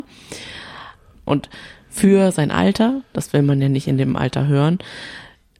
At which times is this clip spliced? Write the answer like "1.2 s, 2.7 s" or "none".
1.1 s